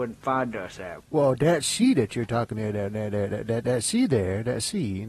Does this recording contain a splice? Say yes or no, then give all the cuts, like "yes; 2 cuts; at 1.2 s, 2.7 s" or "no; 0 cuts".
yes; 1 cut; at 1.0 s